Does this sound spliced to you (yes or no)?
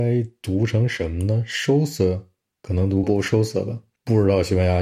yes